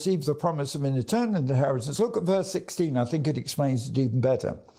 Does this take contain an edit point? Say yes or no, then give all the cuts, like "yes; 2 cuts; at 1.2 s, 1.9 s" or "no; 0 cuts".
no; 0 cuts